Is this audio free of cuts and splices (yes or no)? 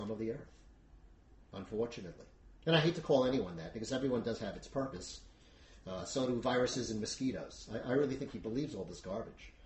no